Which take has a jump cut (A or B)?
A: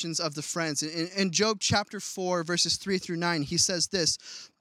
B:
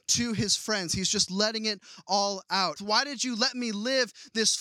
B